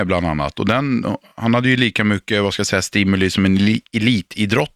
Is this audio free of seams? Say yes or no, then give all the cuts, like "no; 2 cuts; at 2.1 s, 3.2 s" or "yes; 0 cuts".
yes; 0 cuts